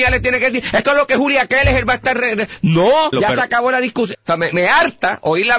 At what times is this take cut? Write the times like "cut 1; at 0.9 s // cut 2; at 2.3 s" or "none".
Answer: cut 1; at 3.1 s // cut 2; at 4.1 s

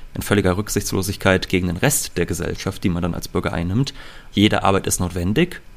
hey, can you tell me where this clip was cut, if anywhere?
cut 1; at 4.3 s

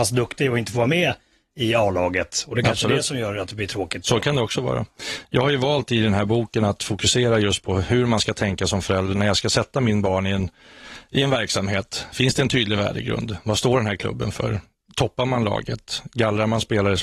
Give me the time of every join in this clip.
none

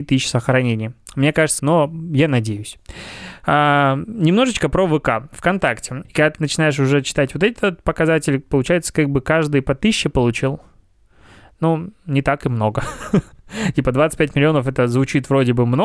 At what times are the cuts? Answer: cut 1; at 1.6 s // cut 2; at 6.0 s

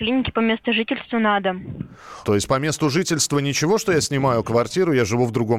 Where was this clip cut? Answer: cut 1; at 2.2 s

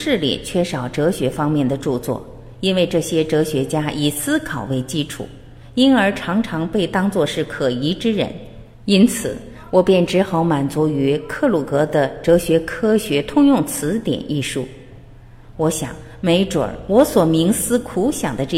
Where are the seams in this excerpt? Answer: cut 1; at 8.7 s // cut 2; at 15.6 s

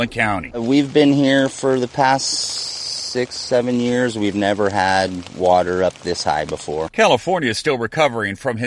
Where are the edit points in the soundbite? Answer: none

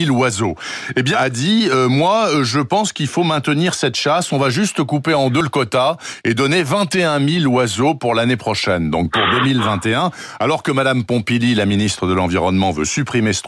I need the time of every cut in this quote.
cut 1; at 1.1 s

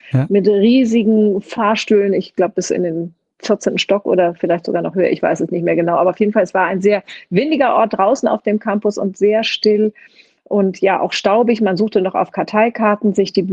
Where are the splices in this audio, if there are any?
none

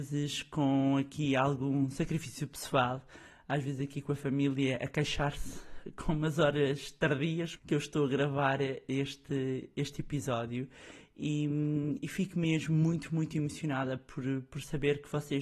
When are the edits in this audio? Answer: cut 1; at 7.6 s

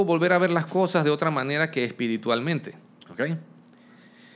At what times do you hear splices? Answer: cut 1; at 3.0 s

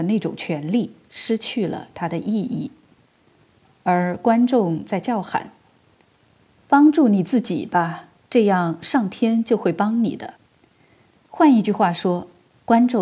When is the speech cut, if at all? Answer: cut 1; at 10.4 s

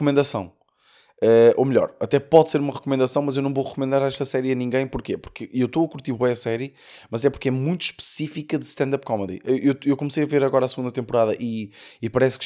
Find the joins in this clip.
none

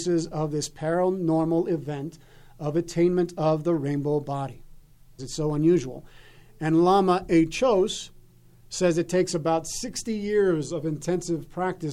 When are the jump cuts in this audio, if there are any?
cut 1; at 5.2 s

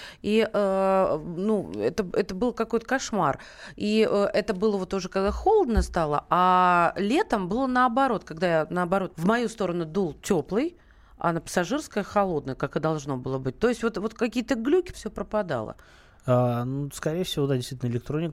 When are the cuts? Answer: cut 1; at 9.1 s // cut 2; at 14.9 s

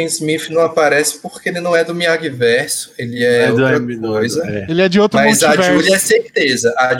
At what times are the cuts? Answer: none

